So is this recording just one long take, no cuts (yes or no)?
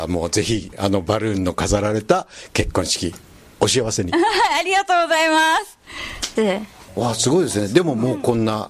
no